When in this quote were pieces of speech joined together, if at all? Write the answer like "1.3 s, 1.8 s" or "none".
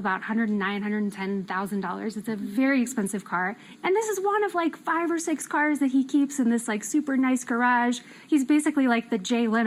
none

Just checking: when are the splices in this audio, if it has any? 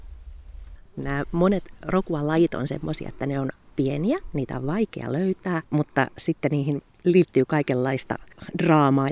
5.6 s

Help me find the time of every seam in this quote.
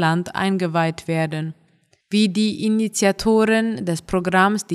2.0 s

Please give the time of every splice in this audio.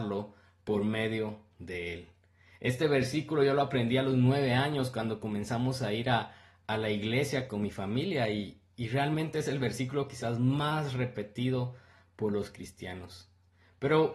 none

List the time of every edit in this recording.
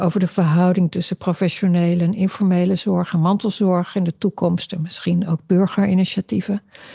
none

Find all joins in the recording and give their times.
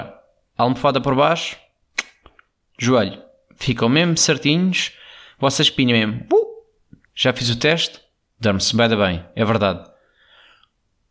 7.0 s

